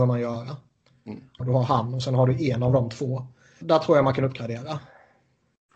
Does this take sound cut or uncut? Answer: cut